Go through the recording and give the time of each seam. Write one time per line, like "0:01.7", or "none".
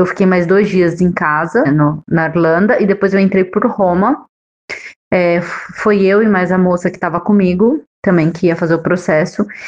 0:01.6

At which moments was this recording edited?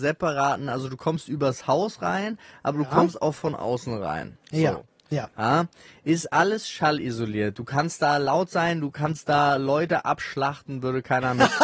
none

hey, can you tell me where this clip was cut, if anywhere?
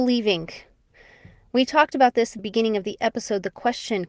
0:02.4

